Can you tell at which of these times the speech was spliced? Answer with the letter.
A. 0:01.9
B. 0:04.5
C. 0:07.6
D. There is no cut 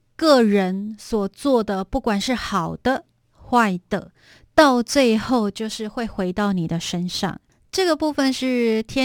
D